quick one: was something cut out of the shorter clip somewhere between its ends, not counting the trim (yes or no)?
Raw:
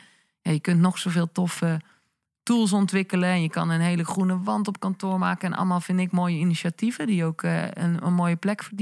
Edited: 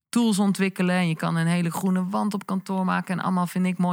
no